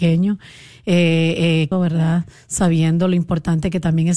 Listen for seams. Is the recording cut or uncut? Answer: cut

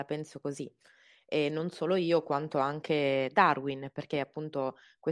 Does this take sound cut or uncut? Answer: uncut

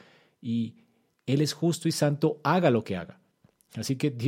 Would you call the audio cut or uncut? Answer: uncut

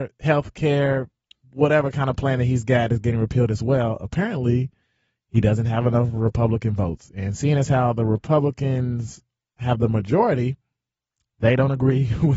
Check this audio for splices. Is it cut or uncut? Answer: uncut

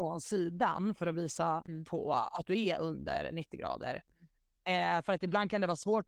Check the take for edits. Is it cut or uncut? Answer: uncut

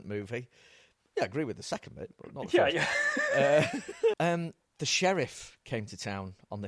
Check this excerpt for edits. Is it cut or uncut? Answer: cut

